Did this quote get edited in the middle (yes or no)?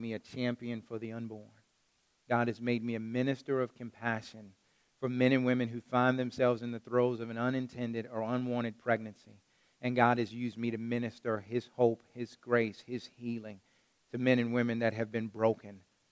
no